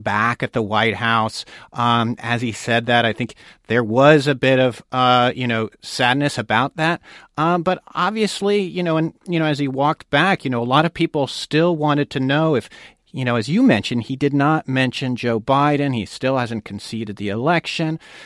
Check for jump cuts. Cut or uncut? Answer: uncut